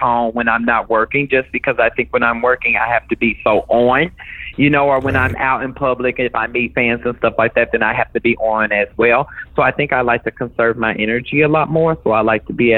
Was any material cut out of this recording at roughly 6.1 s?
no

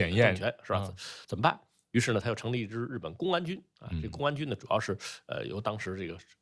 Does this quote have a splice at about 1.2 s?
no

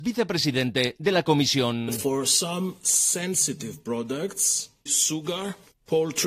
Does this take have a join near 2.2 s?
no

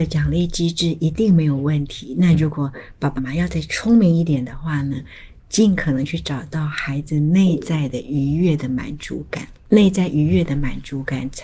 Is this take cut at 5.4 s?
no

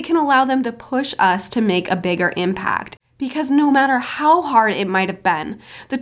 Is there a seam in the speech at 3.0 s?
yes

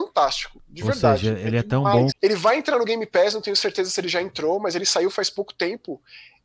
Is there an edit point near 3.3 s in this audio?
no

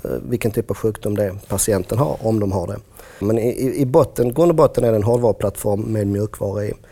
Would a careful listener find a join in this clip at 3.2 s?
yes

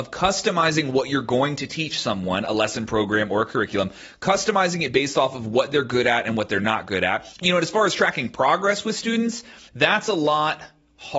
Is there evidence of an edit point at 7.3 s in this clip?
yes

